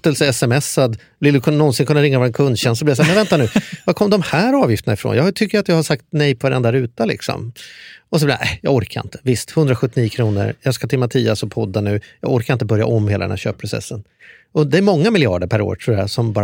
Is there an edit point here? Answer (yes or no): no